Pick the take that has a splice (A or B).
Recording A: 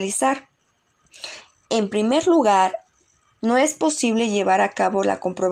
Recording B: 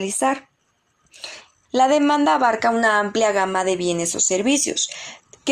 B